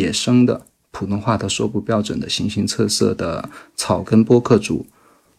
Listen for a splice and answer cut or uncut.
uncut